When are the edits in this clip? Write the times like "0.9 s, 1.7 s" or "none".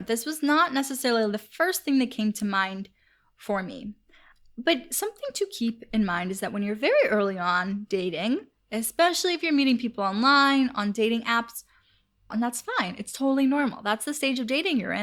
12.3 s